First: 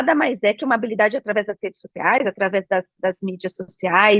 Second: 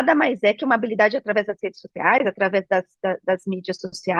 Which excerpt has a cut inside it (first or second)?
first